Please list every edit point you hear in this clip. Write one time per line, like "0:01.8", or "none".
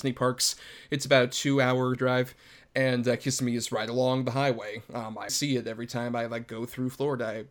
0:02.0
0:05.3